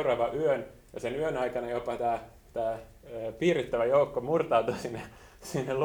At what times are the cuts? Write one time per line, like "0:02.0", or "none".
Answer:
none